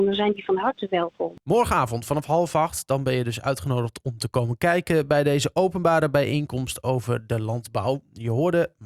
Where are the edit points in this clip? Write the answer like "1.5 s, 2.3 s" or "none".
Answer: none